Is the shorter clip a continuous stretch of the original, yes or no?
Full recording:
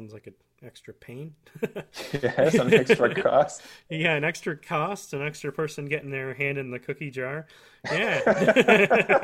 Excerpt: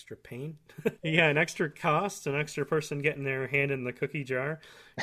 no